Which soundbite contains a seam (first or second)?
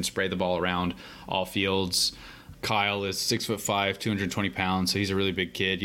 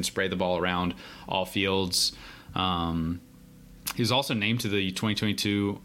first